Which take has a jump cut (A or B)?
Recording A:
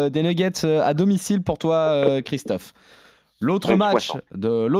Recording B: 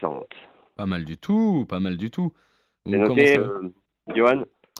B